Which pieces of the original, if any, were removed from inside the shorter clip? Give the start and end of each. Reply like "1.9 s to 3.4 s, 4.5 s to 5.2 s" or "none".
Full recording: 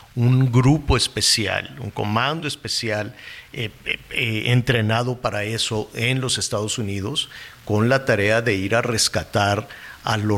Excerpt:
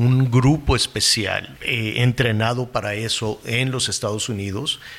1.7 s to 4.0 s